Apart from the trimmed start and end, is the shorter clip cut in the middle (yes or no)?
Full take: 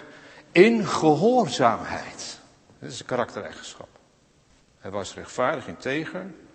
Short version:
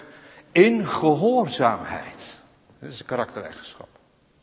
no